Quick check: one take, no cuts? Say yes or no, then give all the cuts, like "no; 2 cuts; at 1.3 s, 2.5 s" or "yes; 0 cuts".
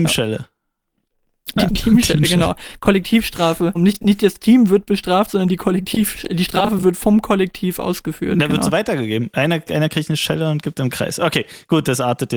no; 2 cuts; at 1.7 s, 3.8 s